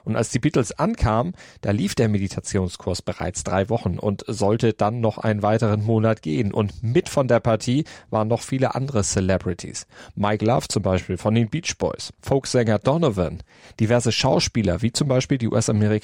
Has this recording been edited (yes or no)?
yes